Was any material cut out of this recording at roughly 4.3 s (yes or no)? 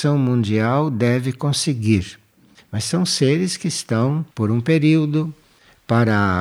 yes